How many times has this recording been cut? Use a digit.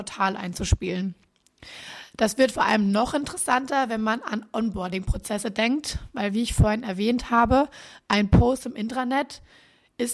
0